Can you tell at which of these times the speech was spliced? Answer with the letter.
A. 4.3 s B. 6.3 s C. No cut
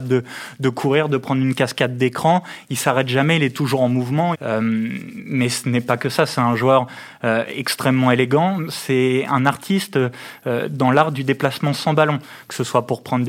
A